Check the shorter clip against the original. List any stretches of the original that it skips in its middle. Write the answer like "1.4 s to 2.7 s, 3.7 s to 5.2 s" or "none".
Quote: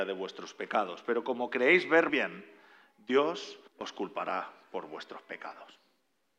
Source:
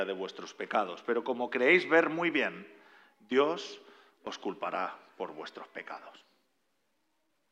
2.1 s to 2.3 s, 3.9 s to 4.1 s